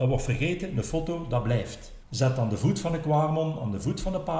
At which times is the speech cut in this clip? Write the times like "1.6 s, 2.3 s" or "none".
2.0 s